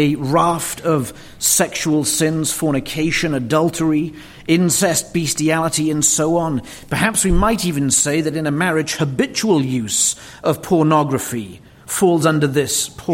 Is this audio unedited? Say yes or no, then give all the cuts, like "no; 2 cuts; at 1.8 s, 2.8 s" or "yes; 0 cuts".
yes; 0 cuts